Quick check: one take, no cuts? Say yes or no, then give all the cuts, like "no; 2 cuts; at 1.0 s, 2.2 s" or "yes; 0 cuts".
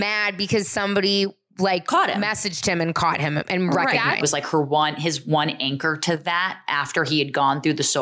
no; 1 cut; at 4.2 s